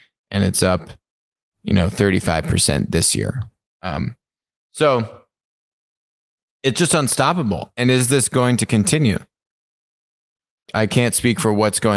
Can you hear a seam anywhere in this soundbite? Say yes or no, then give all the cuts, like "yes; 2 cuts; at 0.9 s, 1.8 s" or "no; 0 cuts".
yes; 1 cut; at 10.7 s